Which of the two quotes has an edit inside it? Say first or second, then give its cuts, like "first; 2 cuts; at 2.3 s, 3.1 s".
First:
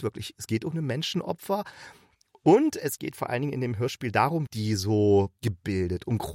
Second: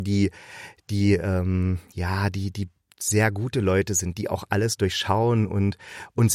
first; 1 cut; at 4.5 s